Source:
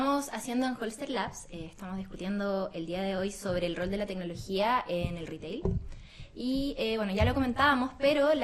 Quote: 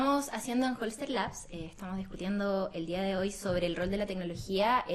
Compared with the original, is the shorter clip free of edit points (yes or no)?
yes